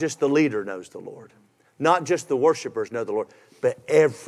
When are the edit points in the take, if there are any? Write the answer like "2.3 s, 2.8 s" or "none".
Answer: none